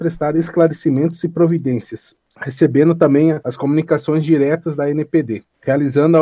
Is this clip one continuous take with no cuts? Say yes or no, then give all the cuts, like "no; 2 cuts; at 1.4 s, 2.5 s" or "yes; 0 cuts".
yes; 0 cuts